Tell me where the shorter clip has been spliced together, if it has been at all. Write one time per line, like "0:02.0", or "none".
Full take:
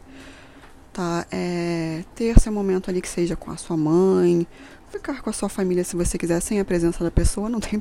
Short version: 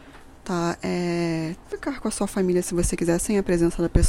0:01.6